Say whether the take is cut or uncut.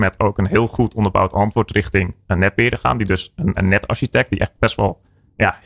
cut